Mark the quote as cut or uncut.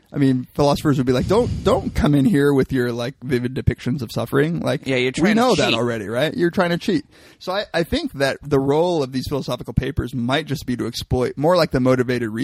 uncut